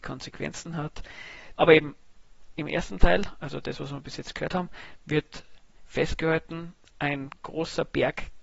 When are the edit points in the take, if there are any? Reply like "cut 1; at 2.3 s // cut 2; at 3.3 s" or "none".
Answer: cut 1; at 1.6 s